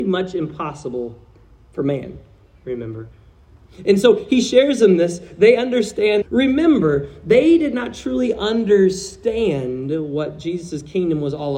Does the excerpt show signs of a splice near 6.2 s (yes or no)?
yes